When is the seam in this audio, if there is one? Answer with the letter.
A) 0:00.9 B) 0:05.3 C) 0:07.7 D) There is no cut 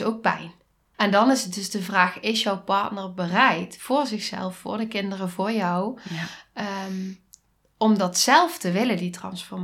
A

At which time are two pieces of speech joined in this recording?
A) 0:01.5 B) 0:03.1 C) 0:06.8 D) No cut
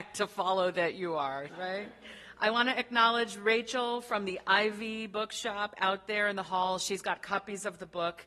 A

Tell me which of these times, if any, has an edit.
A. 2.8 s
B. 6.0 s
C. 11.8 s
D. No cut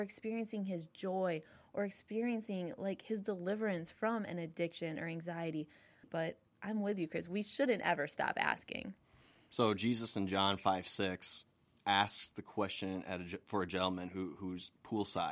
B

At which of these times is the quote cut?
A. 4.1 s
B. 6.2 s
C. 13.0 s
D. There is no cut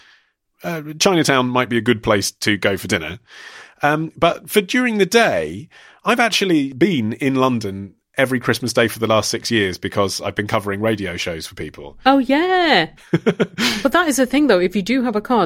C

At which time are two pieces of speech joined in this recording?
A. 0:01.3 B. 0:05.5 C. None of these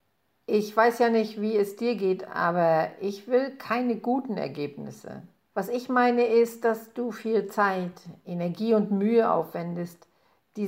B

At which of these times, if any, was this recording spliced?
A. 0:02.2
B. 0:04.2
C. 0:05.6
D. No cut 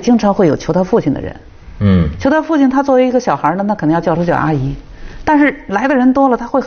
B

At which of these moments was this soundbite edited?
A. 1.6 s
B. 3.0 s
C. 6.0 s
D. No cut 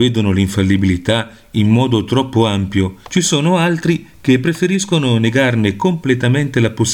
B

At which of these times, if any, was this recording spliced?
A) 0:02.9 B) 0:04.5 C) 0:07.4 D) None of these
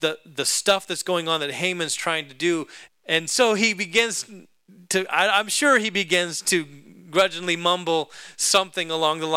A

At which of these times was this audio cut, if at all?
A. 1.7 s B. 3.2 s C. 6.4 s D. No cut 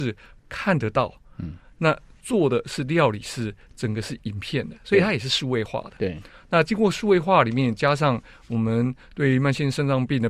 D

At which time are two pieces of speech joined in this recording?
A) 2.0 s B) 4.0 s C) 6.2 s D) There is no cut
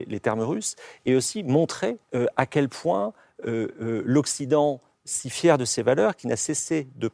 A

